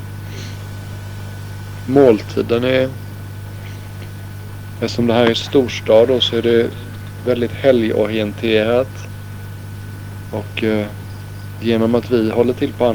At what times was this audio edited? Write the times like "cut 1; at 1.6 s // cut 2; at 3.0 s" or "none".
cut 1; at 10.3 s